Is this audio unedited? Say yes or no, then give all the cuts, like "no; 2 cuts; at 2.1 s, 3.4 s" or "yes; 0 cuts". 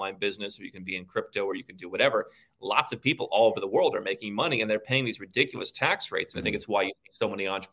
no; 1 cut; at 6.3 s